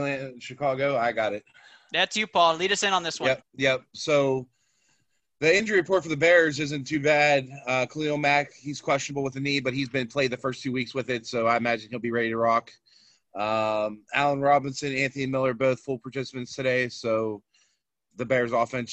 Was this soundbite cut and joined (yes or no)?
yes